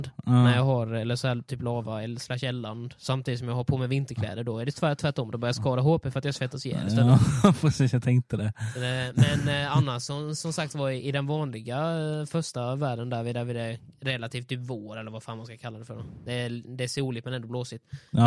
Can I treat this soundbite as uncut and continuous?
yes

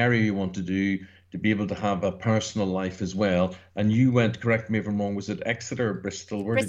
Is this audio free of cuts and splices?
yes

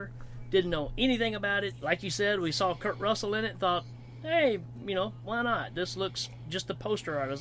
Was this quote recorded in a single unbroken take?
yes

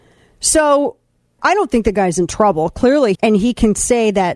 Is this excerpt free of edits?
no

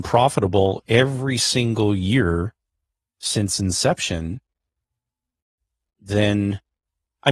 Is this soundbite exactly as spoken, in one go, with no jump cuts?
yes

